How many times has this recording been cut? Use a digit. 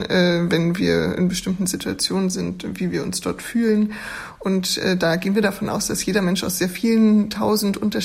0